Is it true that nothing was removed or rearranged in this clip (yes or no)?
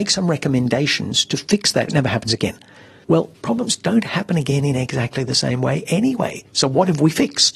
no